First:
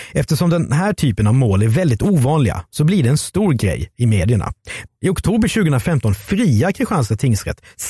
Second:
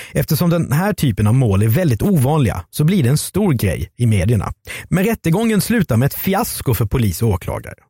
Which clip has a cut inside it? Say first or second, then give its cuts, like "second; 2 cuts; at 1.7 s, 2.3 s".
first; 1 cut; at 4.9 s